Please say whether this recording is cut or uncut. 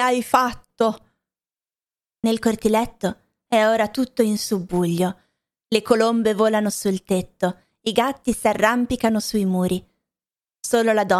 uncut